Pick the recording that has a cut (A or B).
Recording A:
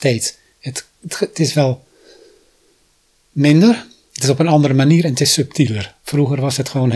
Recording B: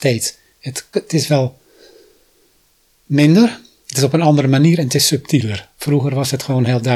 B